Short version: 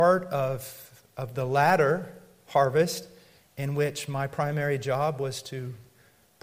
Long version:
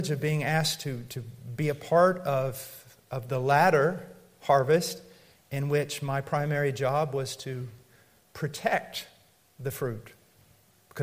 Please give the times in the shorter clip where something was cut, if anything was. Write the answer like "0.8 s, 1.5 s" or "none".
none